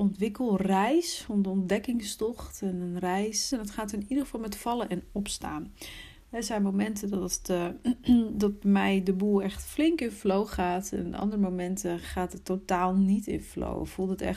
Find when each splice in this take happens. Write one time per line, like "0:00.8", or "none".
0:01.3
0:03.5